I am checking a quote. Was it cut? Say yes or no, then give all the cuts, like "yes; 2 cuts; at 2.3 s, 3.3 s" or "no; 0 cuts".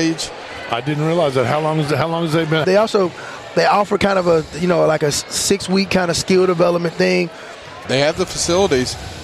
yes; 2 cuts; at 2.6 s, 7.8 s